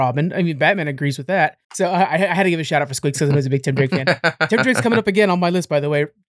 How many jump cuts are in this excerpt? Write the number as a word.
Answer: one